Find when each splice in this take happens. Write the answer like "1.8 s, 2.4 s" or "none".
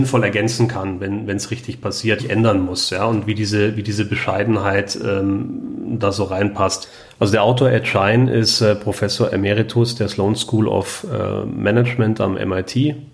2.2 s